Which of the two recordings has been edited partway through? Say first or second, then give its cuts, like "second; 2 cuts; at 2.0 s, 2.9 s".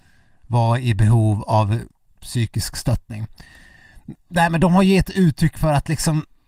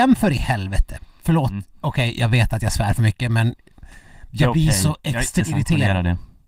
second; 1 cut; at 5.4 s